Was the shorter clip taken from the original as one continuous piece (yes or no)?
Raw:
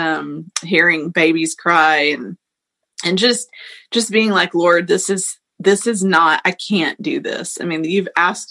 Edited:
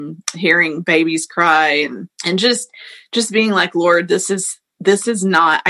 no